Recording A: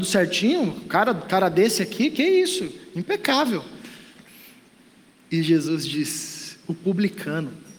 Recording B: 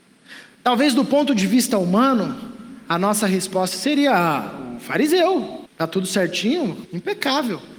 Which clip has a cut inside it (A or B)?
B